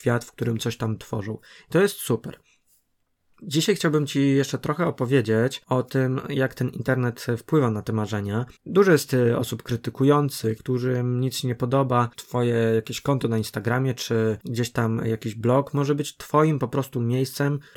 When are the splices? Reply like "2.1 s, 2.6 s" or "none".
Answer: 8.6 s, 10.6 s, 12.1 s